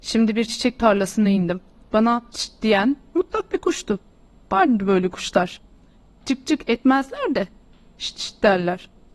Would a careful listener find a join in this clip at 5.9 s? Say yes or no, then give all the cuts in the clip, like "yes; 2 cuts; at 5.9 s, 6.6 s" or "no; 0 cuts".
no; 1 cut; at 2.3 s